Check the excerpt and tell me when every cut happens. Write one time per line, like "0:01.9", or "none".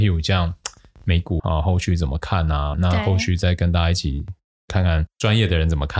0:01.4
0:02.7

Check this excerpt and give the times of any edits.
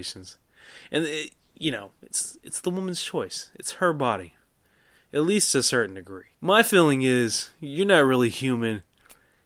0:06.3

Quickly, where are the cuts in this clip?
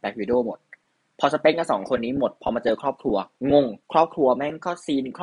0:03.8

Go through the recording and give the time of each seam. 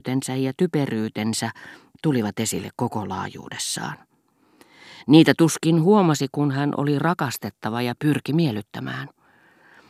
none

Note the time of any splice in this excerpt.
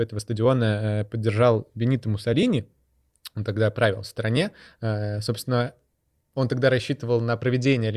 none

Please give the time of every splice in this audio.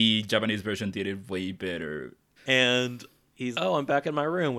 0:02.4
0:03.5

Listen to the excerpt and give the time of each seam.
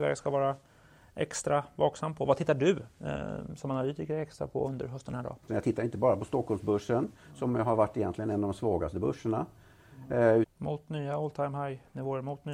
0:05.5
0:10.4

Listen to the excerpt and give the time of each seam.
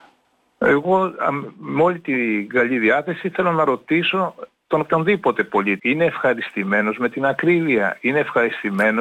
0:05.8

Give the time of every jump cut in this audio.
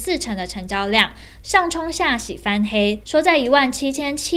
0:01.4
0:03.0

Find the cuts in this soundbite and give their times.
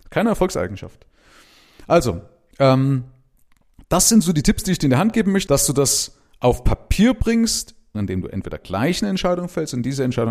0:05.5
0:07.9

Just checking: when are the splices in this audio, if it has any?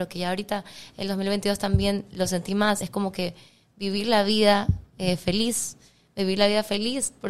none

